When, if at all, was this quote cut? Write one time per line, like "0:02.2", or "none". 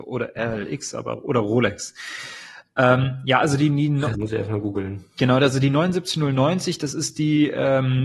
0:04.1

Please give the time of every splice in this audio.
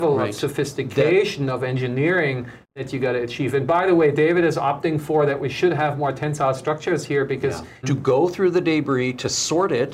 0:07.8

